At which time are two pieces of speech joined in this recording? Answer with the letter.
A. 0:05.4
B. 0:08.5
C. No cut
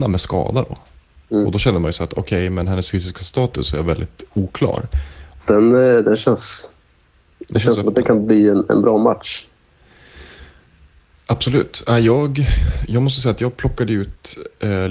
A